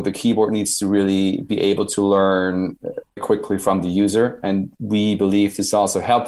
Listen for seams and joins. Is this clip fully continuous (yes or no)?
no